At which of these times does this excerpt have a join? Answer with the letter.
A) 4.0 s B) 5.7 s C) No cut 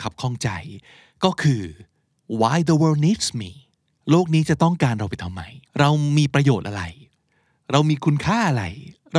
B